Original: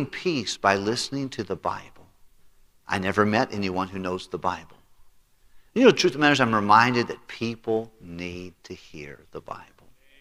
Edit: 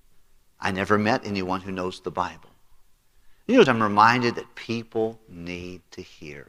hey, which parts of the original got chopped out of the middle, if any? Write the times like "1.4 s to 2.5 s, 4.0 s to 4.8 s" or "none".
5.9 s to 6.4 s

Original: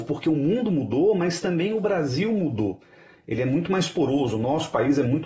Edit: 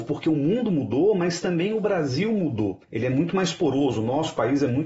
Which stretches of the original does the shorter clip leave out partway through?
2.8 s to 3.2 s

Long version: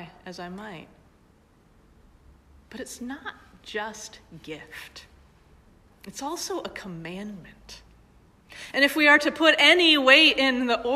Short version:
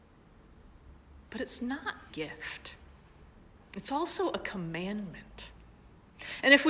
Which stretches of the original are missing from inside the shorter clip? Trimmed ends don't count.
3.5 s to 4.4 s

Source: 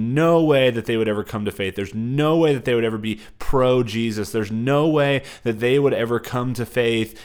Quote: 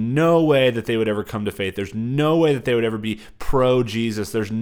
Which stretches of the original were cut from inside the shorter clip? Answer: none

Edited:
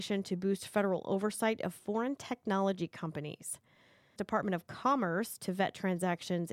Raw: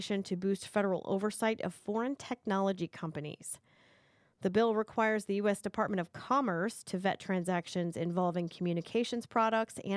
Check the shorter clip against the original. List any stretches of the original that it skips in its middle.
4.2 s to 5.6 s

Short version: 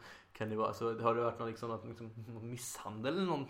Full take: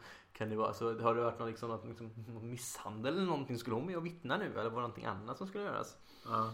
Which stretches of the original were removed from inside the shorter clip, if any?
none

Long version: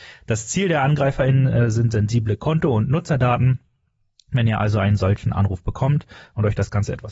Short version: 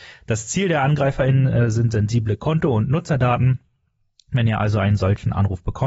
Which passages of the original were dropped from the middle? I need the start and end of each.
none

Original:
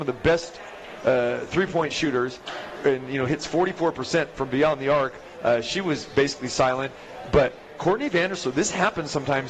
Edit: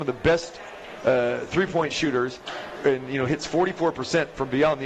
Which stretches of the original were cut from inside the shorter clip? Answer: none

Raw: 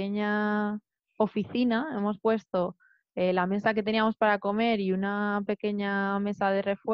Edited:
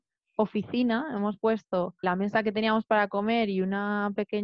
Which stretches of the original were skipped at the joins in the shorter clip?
2.8 s to 3.3 s

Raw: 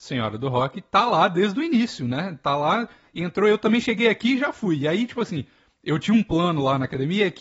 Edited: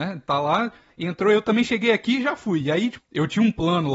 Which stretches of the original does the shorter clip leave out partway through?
5.1 s to 5.7 s

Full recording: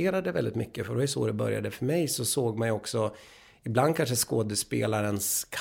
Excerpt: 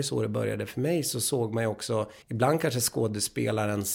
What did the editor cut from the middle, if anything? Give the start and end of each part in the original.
3.3 s to 3.6 s

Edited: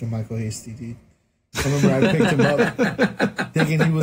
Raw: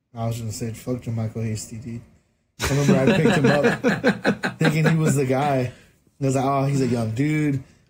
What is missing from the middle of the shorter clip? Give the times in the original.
none

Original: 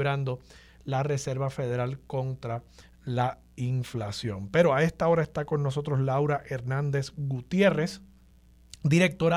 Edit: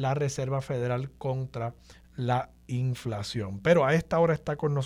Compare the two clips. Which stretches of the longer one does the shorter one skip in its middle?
none

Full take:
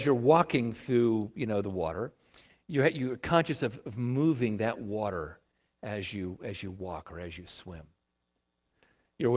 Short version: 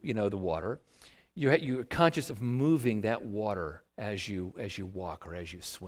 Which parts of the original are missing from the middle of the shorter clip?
3.6 s to 3.8 s, 5.4 s to 5.7 s

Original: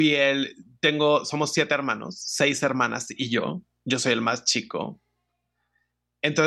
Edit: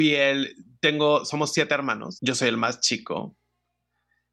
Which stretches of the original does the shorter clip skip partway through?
2.2 s to 3.8 s

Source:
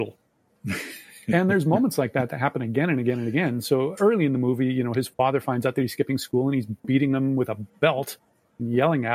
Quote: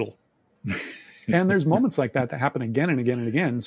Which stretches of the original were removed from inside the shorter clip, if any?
none

